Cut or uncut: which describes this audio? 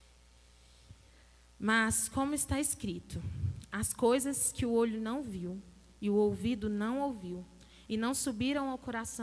uncut